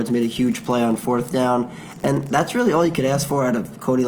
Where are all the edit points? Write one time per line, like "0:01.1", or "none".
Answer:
none